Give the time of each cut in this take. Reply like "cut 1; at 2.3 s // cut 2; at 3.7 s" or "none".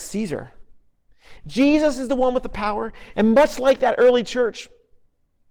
cut 1; at 1.4 s // cut 2; at 3.1 s